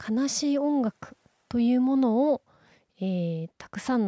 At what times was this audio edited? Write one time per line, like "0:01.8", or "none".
none